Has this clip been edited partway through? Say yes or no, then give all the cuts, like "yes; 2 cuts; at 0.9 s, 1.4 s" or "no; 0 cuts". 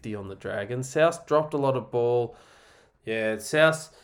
yes; 1 cut; at 2.9 s